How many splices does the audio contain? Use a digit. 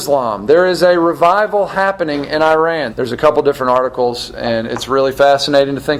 1